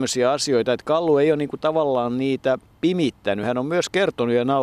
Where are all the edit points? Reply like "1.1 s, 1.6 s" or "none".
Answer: none